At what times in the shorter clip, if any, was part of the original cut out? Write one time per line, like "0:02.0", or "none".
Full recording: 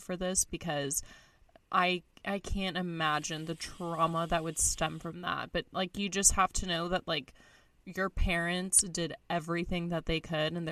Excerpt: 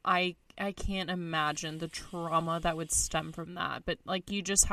none